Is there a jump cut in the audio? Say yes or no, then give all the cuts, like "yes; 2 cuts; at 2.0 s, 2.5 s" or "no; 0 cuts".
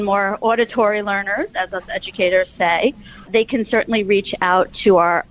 yes; 1 cut; at 3.3 s